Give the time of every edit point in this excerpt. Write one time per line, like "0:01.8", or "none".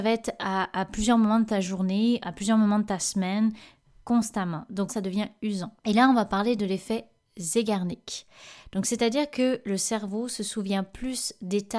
0:04.9